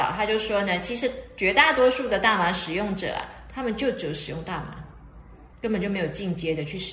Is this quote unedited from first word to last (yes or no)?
no